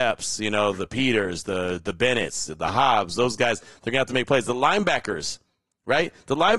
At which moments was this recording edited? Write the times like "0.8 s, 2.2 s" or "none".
none

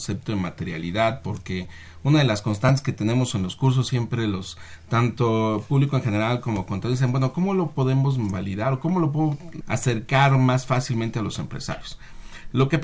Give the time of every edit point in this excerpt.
9.6 s

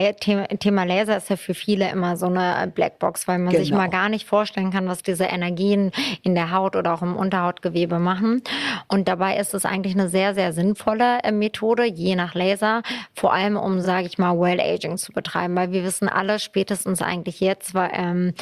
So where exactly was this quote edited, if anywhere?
none

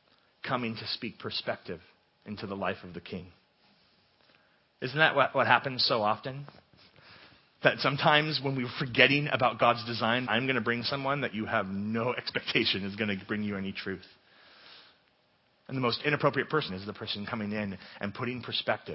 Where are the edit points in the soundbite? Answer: 10.3 s, 16.7 s

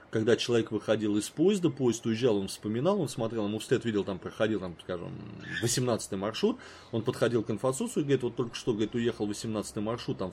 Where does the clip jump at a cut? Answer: none

